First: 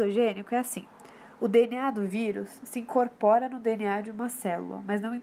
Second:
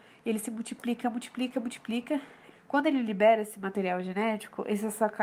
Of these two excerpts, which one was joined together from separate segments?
second; 2 cuts; at 1.0 s, 2.5 s

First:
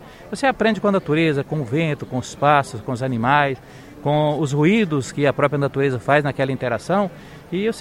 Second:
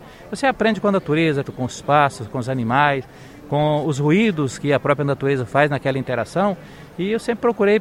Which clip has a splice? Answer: second; 1 cut; at 1.4 s

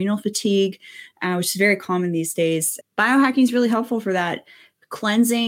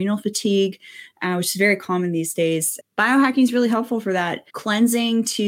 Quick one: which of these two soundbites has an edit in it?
second; 1 cut; at 4.5 s

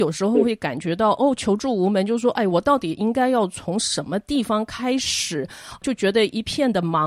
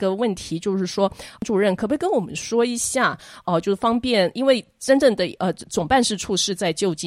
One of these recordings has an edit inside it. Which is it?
second; 1 cut; at 3.4 s

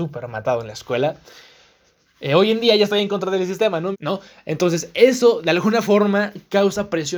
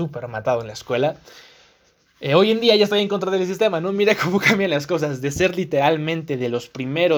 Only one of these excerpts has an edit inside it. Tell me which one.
first; 1 cut; at 3.9 s

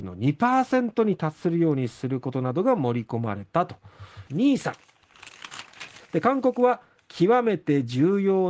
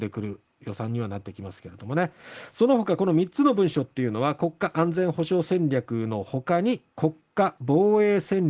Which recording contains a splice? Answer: first; 2 cuts; at 4.3 s, 6.0 s

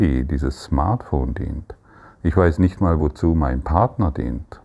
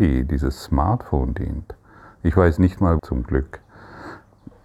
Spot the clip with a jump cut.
second; 1 cut; at 3.0 s

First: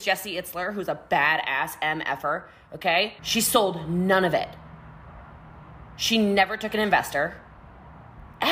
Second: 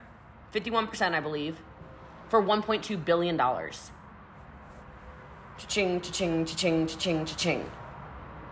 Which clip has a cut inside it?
first; 1 cut; at 3.2 s

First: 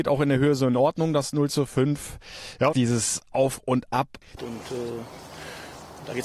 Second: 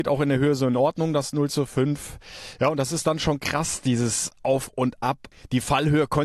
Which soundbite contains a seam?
first; 2 cuts; at 2.7 s, 4.4 s

